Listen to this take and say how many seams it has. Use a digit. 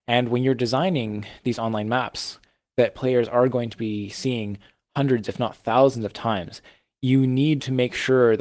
0